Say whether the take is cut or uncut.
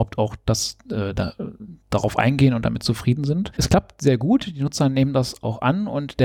cut